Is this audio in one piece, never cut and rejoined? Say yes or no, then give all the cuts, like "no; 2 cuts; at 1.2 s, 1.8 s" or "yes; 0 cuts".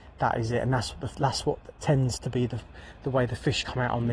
yes; 0 cuts